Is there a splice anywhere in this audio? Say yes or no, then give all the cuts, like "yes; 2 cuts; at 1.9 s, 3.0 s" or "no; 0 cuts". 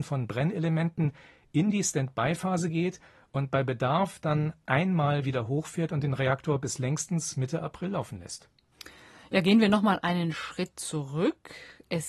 no; 0 cuts